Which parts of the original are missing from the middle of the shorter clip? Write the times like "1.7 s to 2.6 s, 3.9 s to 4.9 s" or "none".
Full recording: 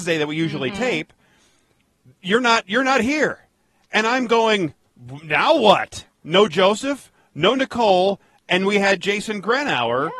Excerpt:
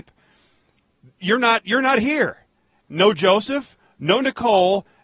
3.8 s to 6.1 s